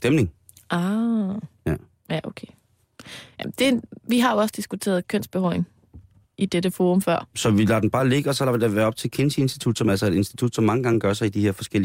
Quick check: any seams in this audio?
yes; 1 cut; at 7.3 s

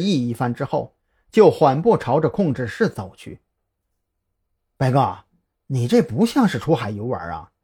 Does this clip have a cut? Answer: yes; 1 cut; at 4.6 s

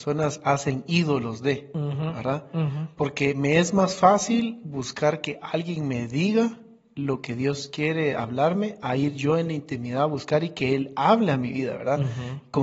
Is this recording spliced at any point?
no; 0 cuts

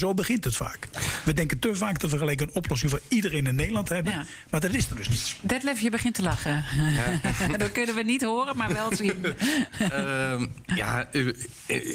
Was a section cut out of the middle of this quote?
no; 0 cuts

